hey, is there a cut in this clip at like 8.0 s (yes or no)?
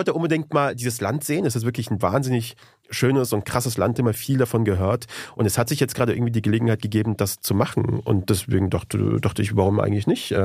no